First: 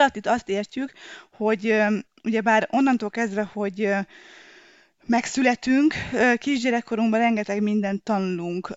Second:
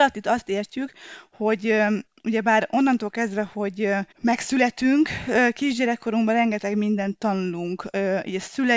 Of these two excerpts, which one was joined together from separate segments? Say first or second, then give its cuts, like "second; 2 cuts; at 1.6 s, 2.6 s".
second; 1 cut; at 4.1 s